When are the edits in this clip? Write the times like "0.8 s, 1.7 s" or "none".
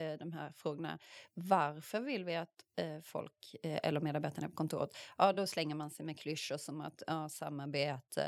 none